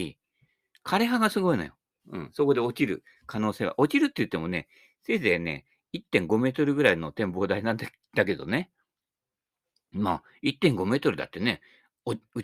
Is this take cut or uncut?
cut